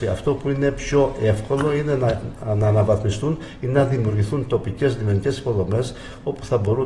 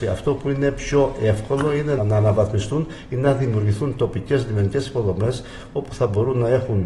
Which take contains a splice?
second; 1 cut; at 2.0 s

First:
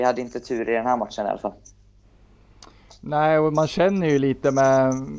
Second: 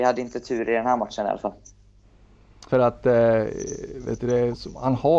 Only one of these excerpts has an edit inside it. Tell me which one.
second; 1 cut; at 2.7 s

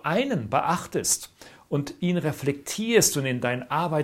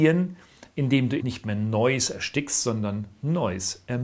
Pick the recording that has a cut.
second; 1 cut; at 1.2 s

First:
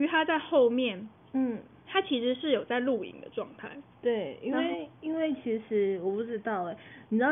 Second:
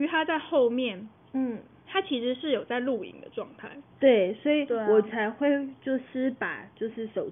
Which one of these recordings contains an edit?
second; 1 cut; at 3.9 s

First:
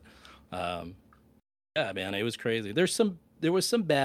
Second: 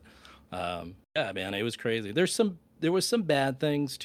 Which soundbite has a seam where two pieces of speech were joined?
second; 1 cut; at 1.0 s

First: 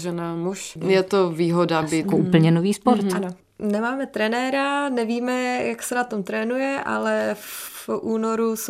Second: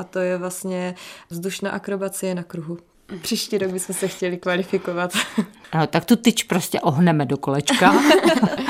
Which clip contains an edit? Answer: first; 1 cut; at 2.0 s

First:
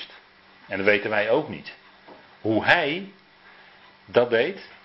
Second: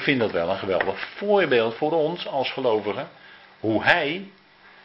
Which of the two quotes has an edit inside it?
first; 1 cut; at 2.3 s

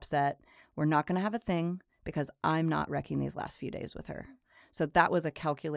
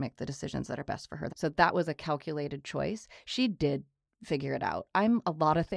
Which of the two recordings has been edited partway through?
second; 1 cut; at 1.3 s

